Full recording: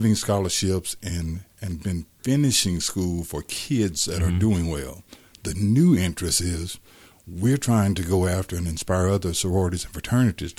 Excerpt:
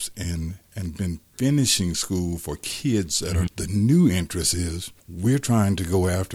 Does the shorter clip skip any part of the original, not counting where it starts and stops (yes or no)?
yes